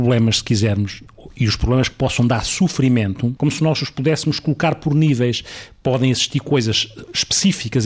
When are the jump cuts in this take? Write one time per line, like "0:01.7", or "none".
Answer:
0:03.4